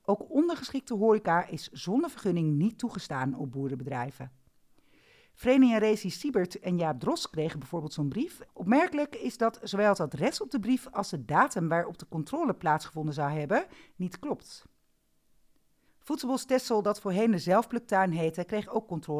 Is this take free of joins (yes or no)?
no